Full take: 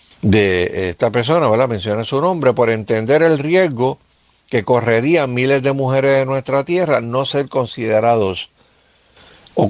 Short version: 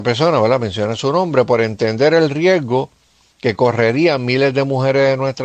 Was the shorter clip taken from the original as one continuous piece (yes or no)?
yes